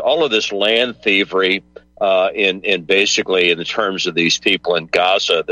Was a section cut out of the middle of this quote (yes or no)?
no